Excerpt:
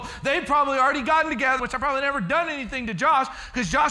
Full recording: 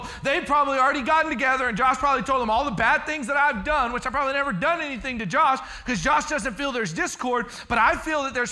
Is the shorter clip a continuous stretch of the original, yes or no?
no